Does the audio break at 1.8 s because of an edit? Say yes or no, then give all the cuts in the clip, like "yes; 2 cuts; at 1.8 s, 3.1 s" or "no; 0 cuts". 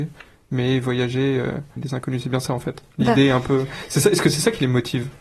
yes; 1 cut; at 1.8 s